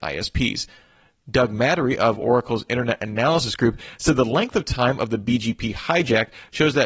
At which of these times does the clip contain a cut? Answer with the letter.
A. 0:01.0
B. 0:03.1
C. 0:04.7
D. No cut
D